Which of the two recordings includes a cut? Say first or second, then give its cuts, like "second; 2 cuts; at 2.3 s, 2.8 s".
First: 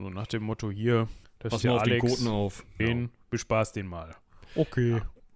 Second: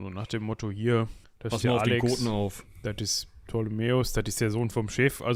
first; 1 cut; at 2.8 s